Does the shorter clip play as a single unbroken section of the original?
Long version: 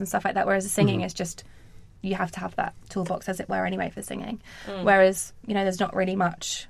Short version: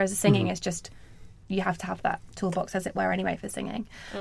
yes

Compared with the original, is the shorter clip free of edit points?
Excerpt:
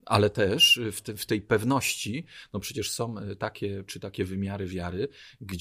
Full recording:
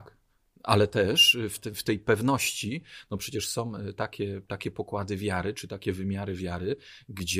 no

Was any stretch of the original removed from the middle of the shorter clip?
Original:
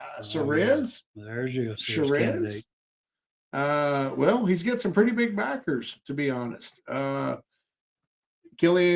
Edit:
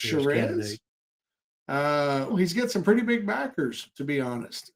yes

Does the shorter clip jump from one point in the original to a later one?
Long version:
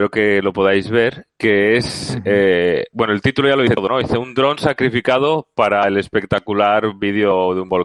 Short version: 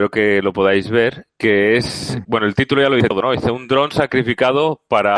yes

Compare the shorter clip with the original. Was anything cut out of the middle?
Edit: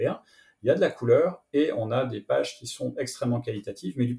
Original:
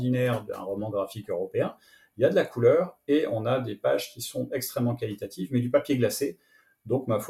no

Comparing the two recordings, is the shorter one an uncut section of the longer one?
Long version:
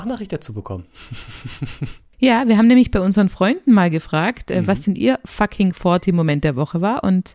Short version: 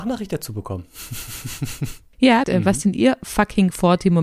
no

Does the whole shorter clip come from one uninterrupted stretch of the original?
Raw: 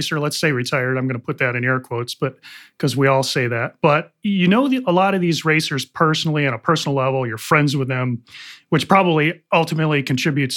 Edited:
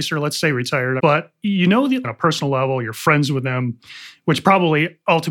no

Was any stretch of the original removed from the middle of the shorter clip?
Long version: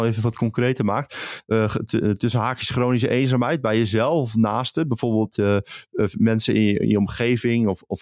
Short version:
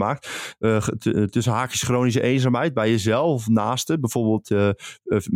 no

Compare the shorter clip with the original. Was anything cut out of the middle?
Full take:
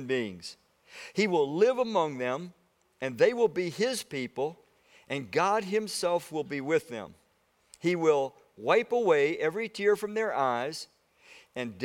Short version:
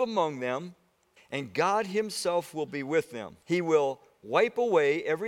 yes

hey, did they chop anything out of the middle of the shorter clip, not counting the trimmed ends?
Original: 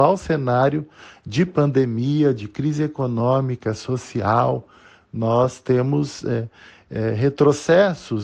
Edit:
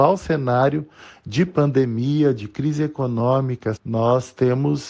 yes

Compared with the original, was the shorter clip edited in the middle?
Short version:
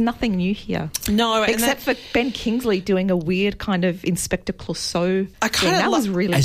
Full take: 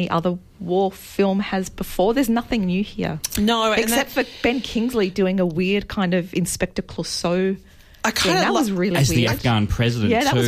yes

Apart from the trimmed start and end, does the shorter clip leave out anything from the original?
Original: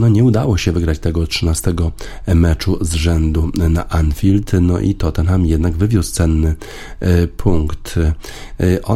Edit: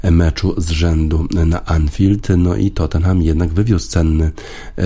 no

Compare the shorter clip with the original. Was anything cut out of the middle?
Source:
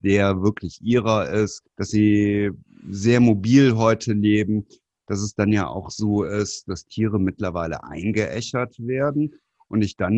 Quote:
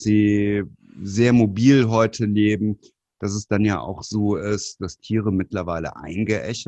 no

